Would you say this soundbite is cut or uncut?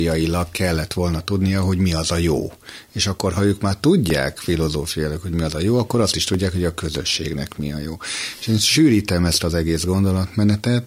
uncut